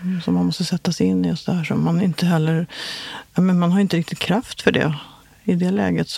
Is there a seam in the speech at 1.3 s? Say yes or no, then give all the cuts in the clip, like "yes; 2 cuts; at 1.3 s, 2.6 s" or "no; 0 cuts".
no; 0 cuts